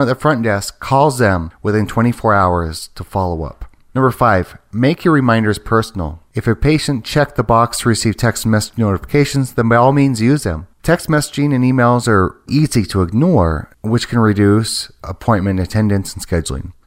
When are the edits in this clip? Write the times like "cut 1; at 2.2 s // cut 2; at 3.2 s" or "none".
cut 1; at 6.3 s // cut 2; at 10.7 s // cut 3; at 12.5 s